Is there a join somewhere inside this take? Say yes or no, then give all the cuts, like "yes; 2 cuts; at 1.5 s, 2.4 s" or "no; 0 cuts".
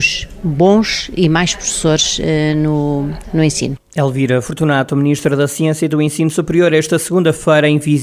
no; 0 cuts